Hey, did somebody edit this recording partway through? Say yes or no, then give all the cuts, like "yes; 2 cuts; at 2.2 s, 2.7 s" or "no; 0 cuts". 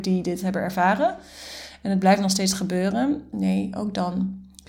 yes; 1 cut; at 3.3 s